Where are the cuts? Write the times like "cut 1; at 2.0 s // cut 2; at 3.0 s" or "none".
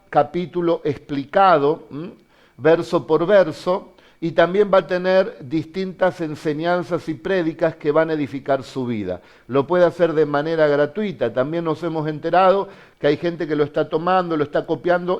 none